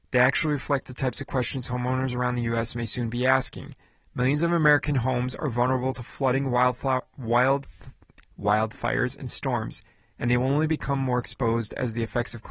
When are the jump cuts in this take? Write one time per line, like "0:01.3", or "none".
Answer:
none